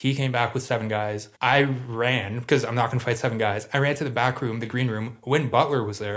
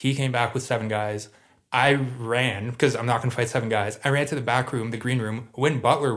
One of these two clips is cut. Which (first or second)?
first